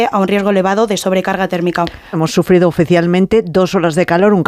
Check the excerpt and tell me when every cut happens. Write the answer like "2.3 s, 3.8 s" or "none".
2.1 s